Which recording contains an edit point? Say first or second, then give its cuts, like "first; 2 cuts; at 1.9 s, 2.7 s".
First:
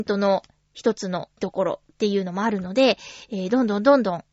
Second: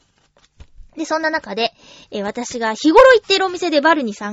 first; 1 cut; at 1.4 s